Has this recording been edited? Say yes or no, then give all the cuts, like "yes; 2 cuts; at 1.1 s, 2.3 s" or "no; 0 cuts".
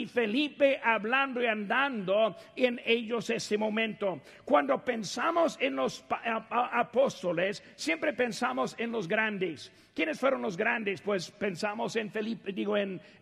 no; 0 cuts